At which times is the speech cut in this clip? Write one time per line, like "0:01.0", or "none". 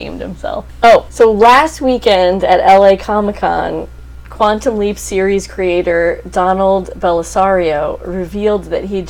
none